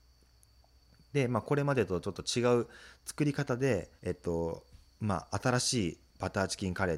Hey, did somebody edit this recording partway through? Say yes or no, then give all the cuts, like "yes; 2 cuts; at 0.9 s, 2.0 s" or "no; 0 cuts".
yes; 1 cut; at 4.0 s